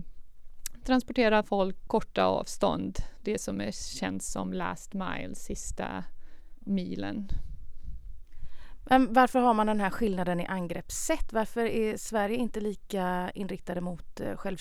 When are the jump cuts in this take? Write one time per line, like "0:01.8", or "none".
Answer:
0:01.9